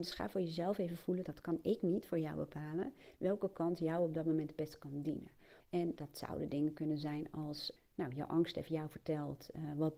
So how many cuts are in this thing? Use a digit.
2